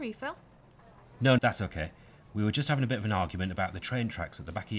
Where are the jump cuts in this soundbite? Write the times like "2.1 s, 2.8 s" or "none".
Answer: 1.4 s